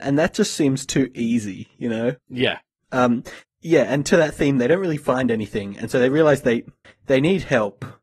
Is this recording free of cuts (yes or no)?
yes